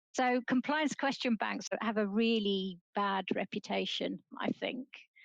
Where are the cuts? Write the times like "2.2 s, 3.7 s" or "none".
2.9 s